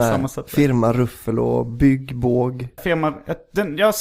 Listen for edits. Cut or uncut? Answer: cut